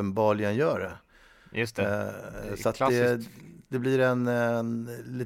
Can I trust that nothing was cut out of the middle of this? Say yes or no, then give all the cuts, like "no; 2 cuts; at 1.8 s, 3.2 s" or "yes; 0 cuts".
yes; 0 cuts